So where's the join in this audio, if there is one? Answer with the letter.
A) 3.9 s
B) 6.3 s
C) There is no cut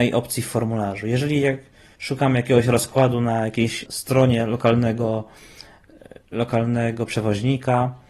A